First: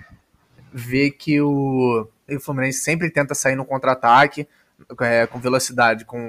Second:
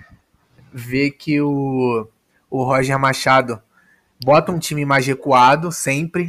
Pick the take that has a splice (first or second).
first